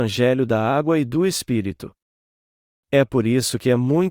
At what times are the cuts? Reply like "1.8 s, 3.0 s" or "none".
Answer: none

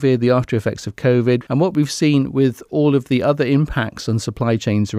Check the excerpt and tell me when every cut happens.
1.4 s

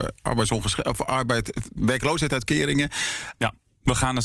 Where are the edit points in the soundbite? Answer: 1.8 s, 3.3 s

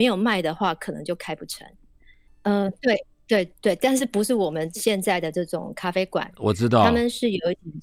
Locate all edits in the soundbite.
2.3 s

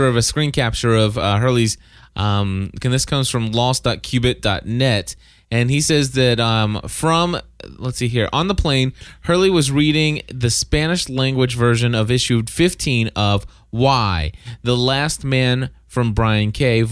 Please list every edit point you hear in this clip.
2.8 s

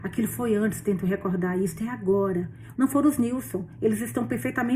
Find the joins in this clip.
2.7 s

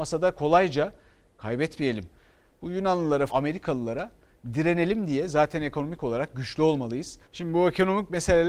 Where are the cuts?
3.3 s, 7.2 s

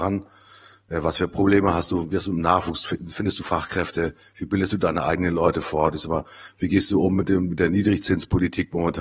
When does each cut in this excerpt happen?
none

